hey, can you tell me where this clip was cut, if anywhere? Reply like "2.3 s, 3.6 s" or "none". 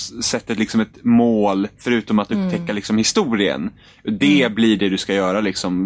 none